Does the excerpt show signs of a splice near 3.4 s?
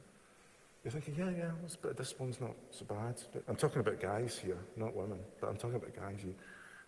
yes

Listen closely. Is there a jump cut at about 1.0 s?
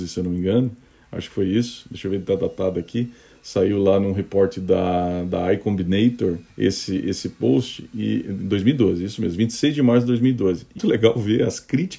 no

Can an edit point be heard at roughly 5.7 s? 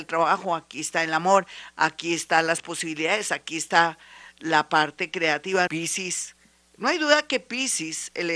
yes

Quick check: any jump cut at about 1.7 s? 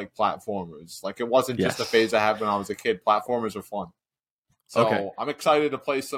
no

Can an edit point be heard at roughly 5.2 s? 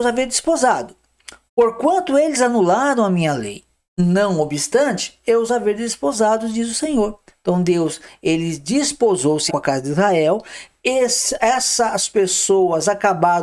no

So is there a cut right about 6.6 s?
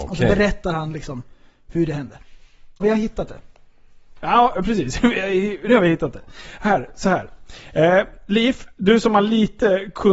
no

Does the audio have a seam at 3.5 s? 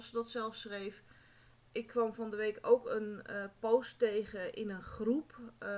no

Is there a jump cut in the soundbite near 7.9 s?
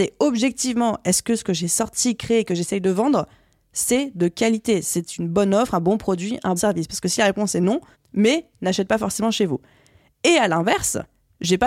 yes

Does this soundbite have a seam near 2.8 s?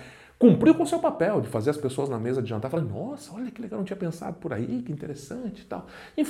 no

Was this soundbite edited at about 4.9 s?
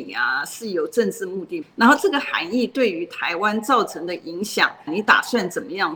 yes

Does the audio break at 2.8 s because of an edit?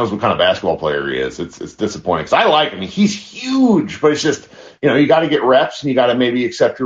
no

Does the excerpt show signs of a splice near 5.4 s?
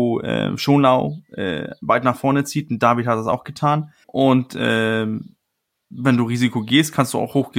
no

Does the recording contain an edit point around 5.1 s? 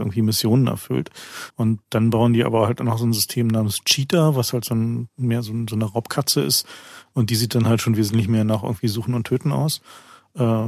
no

